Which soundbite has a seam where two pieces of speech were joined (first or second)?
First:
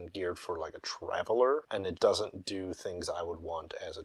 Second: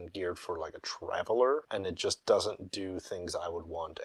first